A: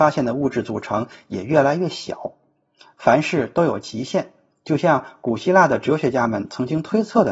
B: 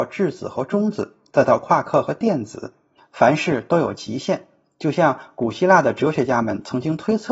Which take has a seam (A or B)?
B